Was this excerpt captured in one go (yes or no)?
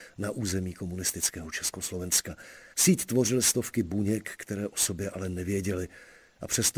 no